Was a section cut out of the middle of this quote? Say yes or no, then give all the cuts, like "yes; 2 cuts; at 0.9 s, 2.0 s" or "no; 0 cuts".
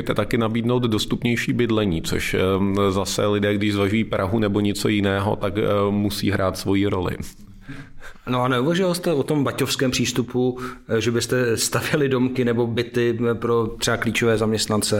no; 0 cuts